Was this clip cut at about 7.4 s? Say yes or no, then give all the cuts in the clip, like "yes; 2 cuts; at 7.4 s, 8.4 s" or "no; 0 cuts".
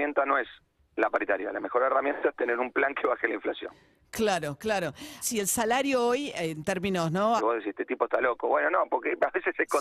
yes; 2 cuts; at 5.2 s, 7.4 s